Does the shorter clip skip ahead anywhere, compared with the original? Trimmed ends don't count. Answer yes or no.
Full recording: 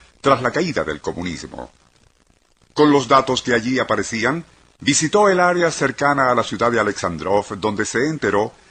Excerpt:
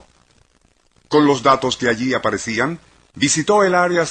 no